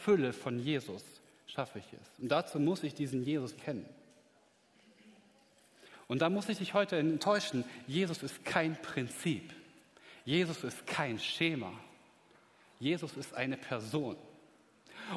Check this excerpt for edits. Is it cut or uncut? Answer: cut